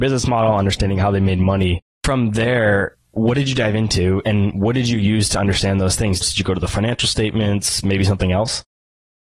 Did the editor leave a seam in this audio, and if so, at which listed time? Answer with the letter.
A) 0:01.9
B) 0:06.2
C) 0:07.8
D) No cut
B